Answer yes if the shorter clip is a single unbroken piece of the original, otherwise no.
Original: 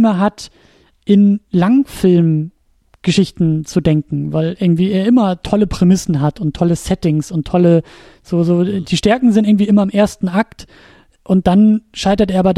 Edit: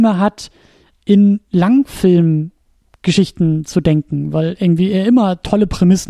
yes